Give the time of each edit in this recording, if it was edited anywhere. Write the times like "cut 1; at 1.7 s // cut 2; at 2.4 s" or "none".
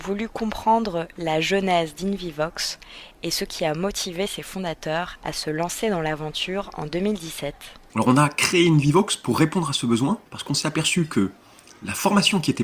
cut 1; at 7.9 s // cut 2; at 10.3 s